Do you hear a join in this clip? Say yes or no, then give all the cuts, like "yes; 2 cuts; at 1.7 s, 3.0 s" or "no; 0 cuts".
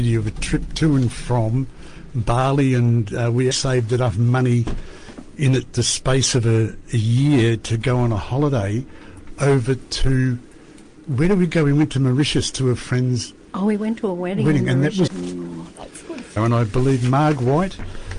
yes; 3 cuts; at 3.5 s, 15.1 s, 16.4 s